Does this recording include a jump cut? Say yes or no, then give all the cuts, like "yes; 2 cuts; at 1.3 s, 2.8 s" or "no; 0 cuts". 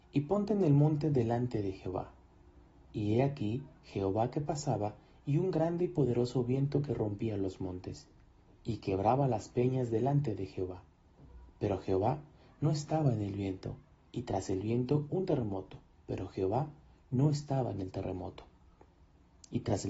no; 0 cuts